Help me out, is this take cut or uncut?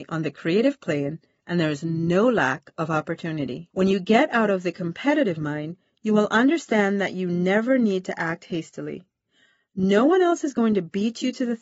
cut